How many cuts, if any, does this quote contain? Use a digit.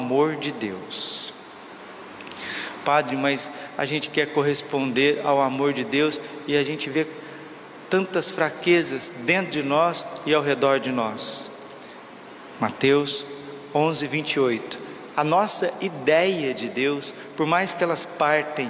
1